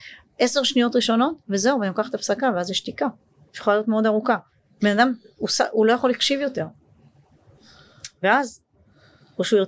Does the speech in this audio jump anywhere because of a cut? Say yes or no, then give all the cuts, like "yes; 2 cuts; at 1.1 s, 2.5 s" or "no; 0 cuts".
no; 0 cuts